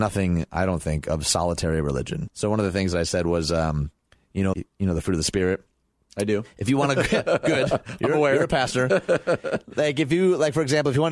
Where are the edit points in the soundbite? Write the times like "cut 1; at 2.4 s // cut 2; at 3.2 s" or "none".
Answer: cut 1; at 2.3 s // cut 2; at 4.5 s